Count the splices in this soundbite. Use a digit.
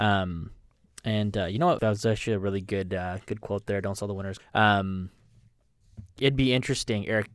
2